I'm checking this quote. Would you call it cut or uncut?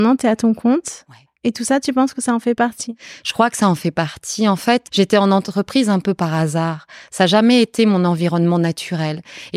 cut